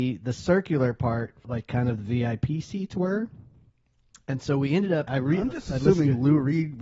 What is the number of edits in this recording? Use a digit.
2